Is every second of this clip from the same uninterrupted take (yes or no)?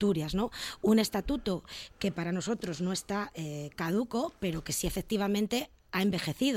yes